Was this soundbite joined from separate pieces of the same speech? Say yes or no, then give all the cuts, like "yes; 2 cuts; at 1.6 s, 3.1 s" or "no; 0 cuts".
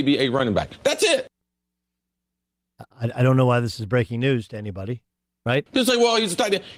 yes; 2 cuts; at 2.9 s, 5.7 s